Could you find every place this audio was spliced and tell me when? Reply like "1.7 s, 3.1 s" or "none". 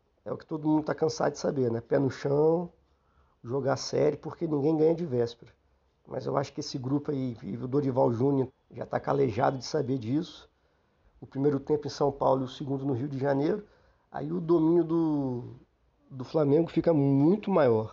8.5 s, 11.0 s